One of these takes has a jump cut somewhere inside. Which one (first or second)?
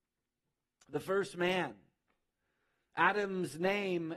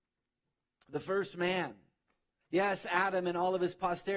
second